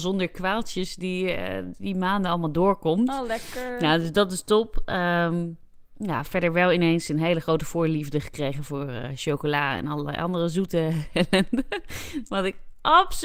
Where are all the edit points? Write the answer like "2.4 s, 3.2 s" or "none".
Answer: none